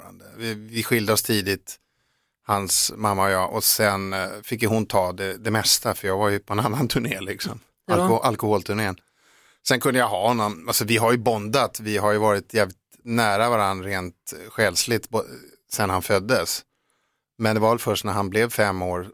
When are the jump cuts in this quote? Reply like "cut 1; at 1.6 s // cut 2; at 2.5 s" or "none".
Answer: none